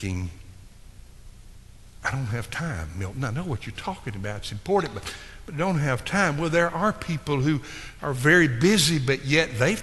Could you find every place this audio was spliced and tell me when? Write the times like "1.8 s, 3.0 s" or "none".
none